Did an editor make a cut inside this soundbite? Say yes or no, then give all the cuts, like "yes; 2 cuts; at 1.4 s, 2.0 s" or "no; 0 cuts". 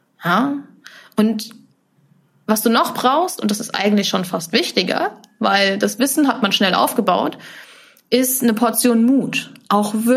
no; 0 cuts